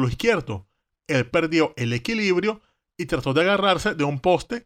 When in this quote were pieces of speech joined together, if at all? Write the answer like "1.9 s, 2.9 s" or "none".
none